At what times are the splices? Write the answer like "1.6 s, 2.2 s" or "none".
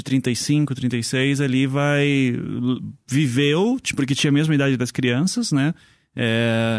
none